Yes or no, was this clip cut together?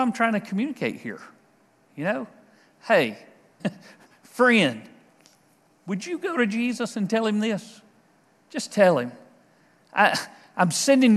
yes